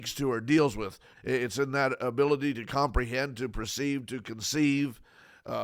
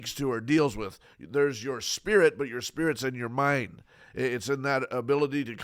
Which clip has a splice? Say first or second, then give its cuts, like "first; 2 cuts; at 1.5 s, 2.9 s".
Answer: first; 1 cut; at 1.1 s